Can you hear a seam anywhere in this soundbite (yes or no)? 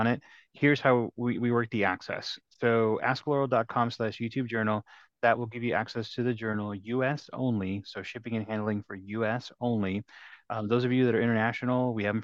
no